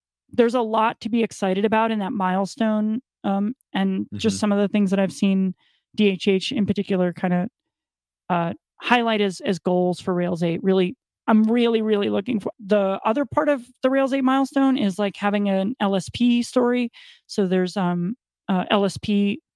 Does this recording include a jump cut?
yes; 3 cuts; at 3.6 s, 11.1 s, 12.5 s

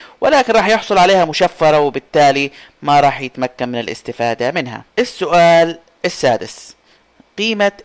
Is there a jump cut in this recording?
yes; 1 cut; at 4.9 s

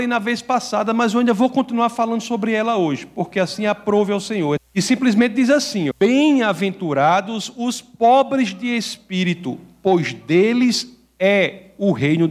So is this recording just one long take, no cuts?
no; 2 cuts; at 4.6 s, 5.9 s

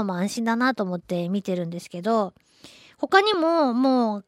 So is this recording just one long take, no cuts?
yes; 0 cuts

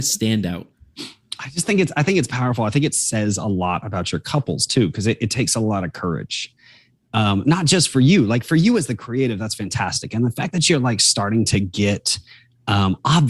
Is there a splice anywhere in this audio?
no; 0 cuts

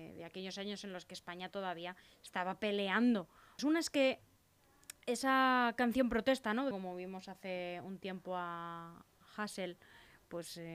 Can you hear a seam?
yes; 2 cuts; at 3.6 s, 6.7 s

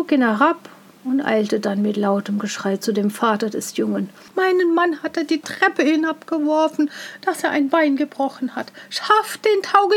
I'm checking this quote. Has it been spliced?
yes; 1 cut; at 4.3 s

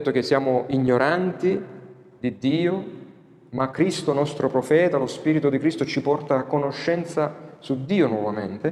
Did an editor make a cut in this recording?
no; 0 cuts

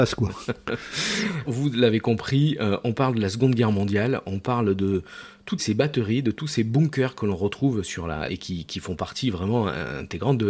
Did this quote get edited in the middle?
yes; 3 cuts; at 1.4 s, 5.6 s, 8.3 s

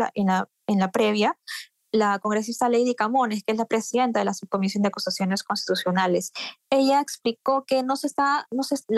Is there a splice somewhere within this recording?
no; 0 cuts

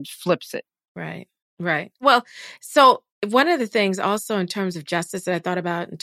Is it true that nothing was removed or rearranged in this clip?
yes; 0 cuts

